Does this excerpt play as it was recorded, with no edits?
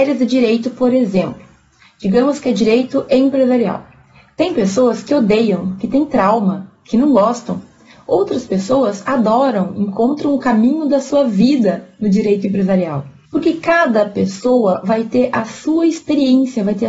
no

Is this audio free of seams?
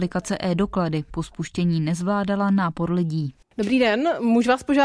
no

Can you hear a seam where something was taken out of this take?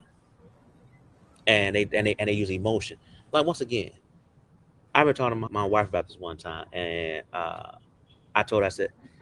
yes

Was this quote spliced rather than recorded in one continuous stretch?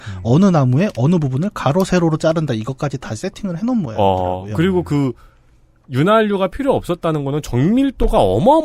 no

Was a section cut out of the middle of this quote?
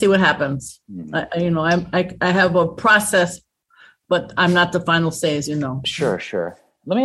no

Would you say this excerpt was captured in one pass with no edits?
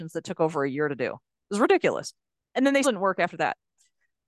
no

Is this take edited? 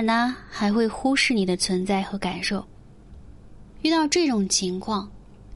yes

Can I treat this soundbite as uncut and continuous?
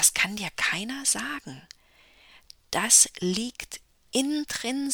yes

